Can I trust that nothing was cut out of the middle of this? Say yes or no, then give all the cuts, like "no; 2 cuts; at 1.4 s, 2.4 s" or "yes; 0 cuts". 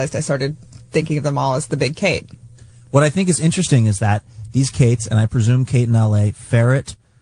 yes; 0 cuts